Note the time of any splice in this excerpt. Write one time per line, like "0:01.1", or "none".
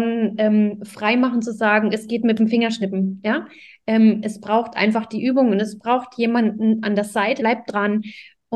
0:07.4